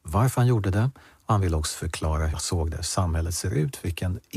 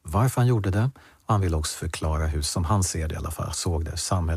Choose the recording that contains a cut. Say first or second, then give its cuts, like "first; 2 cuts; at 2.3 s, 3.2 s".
first; 1 cut; at 2.3 s